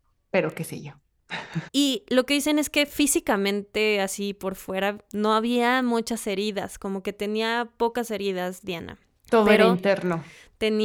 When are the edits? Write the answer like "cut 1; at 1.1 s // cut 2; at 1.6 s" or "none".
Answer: cut 1; at 1.7 s